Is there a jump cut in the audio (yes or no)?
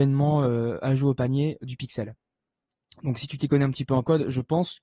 no